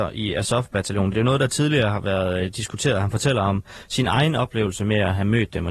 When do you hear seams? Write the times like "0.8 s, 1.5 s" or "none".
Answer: none